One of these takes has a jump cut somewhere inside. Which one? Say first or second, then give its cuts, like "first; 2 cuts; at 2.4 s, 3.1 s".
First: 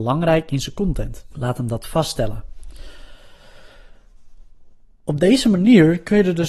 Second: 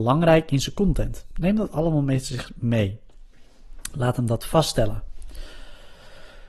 first; 1 cut; at 1.3 s